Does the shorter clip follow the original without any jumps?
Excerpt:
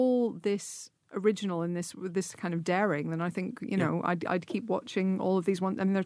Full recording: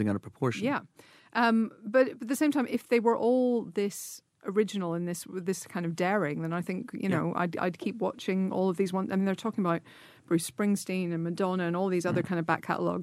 yes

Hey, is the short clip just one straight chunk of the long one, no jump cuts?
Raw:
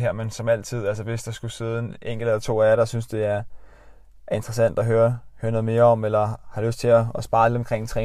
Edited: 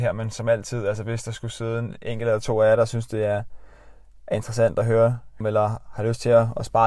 no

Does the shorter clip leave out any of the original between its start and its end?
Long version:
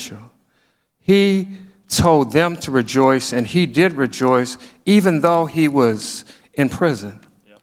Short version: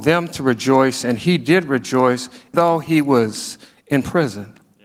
yes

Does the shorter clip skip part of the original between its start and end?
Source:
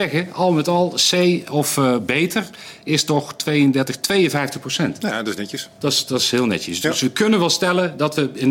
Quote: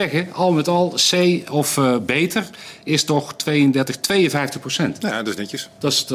no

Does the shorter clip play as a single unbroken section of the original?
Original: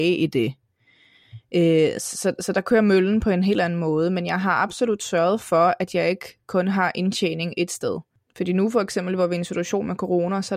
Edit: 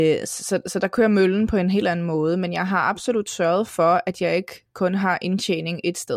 yes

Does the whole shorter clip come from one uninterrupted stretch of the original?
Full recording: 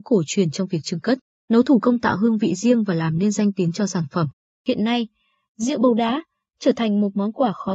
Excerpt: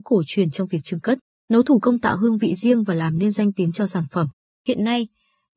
yes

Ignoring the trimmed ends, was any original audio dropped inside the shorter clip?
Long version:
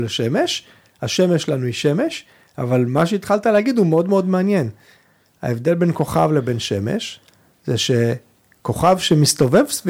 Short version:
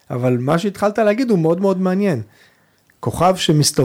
yes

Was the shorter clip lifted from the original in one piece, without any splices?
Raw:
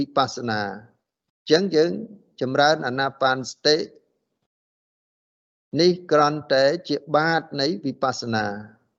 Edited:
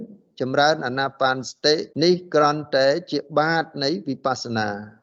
no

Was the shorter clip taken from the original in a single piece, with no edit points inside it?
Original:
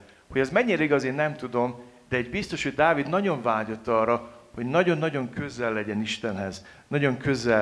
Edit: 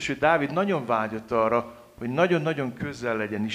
yes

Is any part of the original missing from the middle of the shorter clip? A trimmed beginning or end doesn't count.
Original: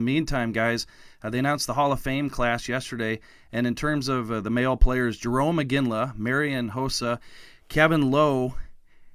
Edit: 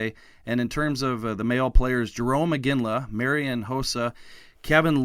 no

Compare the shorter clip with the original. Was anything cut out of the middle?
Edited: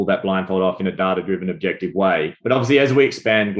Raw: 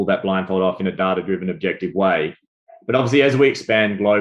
yes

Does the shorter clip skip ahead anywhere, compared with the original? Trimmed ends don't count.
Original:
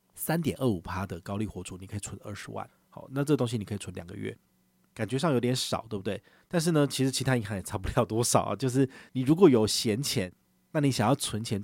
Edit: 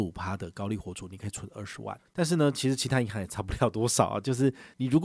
yes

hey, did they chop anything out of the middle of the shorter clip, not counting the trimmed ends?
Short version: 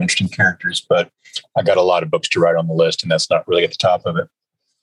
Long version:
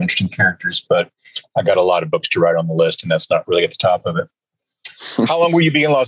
no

